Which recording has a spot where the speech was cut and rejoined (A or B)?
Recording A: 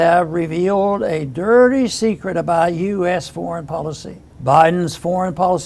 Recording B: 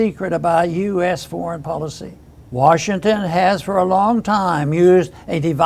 A